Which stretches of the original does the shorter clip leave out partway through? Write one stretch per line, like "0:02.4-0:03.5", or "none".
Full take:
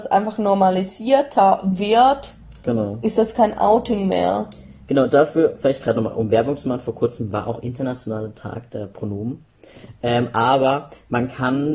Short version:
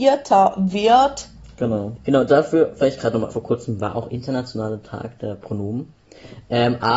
0:03.0-0:04.8
0:06.1-0:06.8